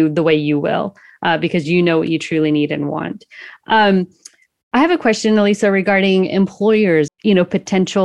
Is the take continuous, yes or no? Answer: no